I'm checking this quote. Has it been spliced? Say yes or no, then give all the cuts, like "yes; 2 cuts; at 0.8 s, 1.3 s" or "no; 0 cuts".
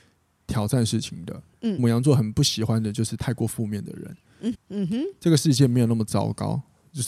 yes; 2 cuts; at 1.8 s, 4.5 s